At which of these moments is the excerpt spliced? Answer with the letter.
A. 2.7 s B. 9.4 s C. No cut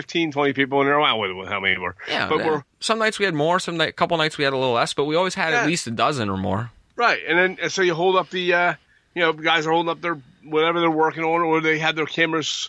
A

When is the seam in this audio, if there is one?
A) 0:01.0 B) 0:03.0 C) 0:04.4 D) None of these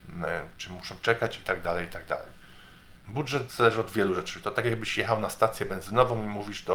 B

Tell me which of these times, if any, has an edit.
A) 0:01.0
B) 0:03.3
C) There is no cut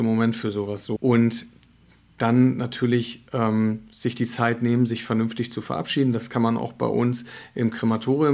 A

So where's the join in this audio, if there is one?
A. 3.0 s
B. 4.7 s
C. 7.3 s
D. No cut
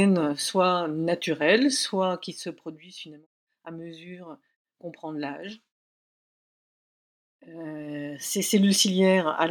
D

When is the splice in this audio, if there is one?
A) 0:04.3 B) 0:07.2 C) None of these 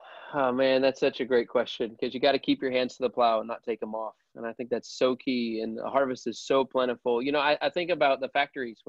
C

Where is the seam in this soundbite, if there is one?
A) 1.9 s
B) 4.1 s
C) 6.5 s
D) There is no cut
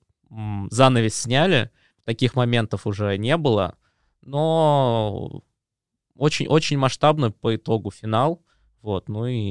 A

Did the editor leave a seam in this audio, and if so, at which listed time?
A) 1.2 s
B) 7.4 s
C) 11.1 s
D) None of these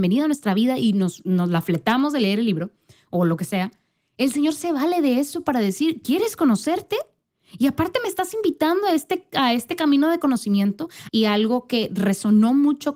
C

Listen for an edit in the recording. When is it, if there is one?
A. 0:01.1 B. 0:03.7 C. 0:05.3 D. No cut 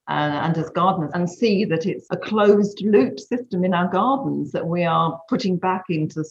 A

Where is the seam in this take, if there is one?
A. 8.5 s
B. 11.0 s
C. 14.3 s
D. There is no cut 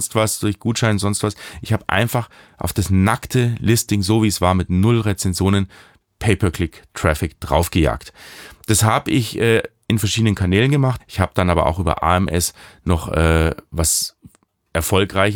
B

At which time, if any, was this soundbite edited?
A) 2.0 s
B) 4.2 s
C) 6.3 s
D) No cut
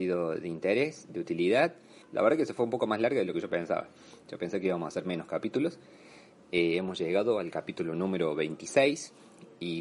A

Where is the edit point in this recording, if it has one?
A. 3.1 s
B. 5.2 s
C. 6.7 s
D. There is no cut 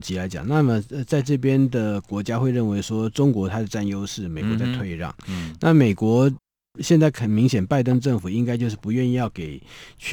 D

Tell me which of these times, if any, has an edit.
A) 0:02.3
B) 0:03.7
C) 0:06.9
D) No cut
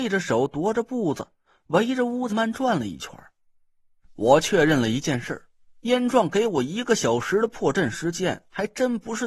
A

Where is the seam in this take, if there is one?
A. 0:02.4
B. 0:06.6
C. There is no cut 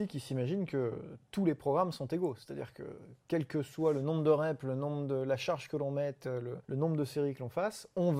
B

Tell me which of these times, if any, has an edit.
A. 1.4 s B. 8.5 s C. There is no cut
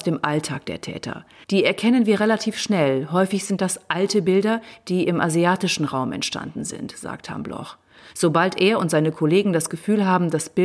A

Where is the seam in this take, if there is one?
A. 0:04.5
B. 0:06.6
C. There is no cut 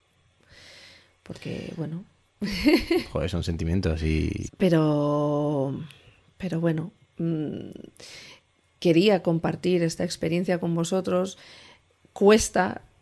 A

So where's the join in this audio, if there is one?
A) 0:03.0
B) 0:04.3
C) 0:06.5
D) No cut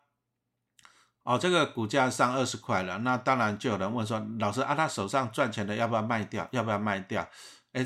D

